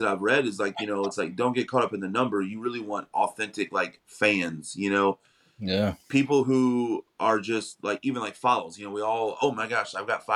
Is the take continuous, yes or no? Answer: yes